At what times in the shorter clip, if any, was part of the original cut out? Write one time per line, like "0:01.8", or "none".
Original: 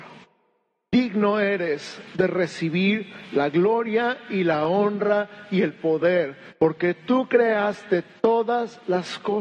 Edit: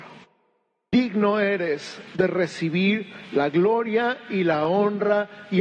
none